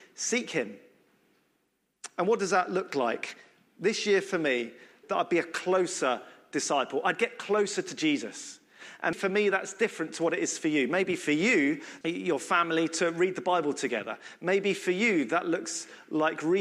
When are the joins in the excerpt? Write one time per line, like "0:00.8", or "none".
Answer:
0:05.0
0:09.1
0:12.0